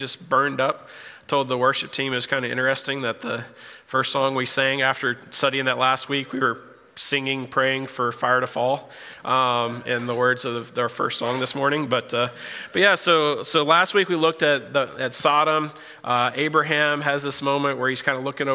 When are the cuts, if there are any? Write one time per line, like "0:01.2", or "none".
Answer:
none